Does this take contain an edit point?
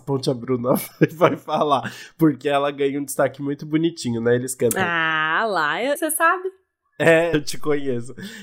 yes; 2 cuts; at 6.0 s, 7.3 s

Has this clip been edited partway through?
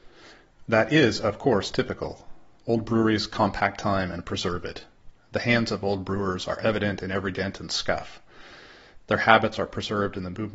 no; 0 cuts

